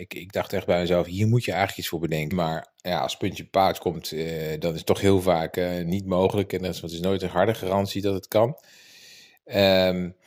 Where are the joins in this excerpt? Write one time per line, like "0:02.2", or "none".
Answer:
0:02.3